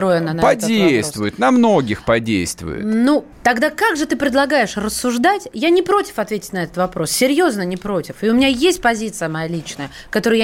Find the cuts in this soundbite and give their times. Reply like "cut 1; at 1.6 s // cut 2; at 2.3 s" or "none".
cut 1; at 3.3 s